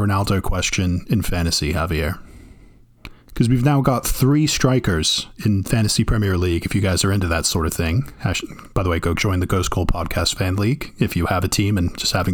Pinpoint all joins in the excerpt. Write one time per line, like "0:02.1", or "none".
0:03.2

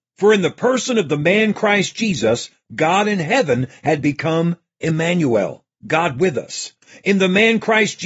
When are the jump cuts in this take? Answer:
none

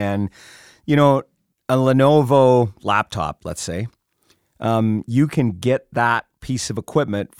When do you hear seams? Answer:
none

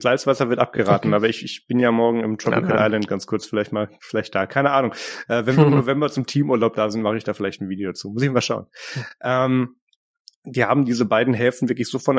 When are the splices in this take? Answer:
none

